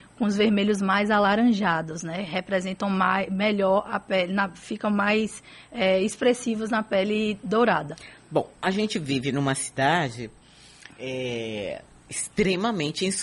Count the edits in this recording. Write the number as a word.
zero